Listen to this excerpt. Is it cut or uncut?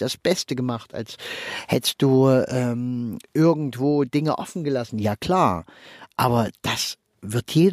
uncut